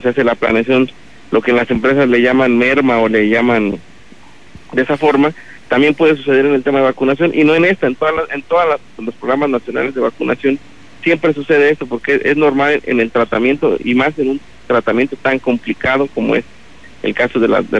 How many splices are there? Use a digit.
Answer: 0